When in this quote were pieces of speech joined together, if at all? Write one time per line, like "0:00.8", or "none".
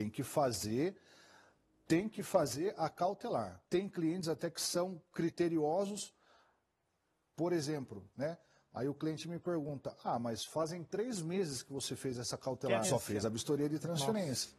0:03.6
0:08.1
0:12.8